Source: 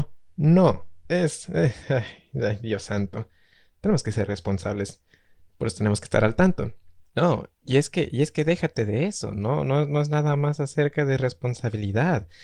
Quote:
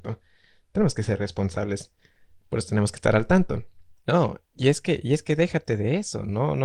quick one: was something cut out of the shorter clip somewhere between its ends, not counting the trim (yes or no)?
no